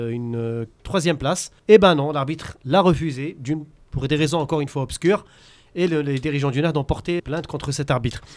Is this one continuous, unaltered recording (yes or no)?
no